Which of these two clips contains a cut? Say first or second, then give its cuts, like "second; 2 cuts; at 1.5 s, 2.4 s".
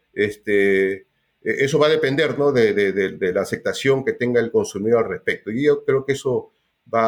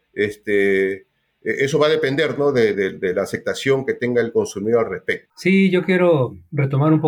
second; 2 cuts; at 2.7 s, 5.2 s